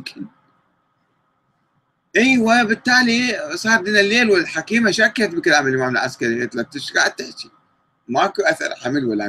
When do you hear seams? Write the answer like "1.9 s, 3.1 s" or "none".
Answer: none